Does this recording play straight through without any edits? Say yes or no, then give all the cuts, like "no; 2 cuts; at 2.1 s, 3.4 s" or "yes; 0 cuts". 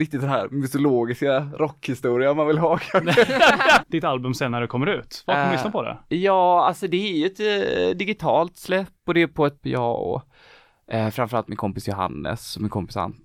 no; 2 cuts; at 3.8 s, 9.6 s